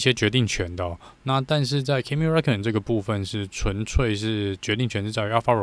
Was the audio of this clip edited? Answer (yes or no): no